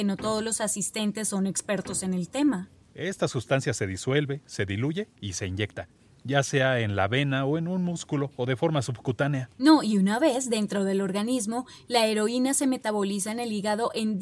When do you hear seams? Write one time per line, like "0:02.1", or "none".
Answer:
0:02.8